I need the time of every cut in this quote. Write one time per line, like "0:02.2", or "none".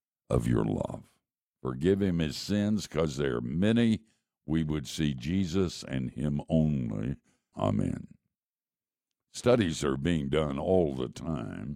0:01.5
0:07.5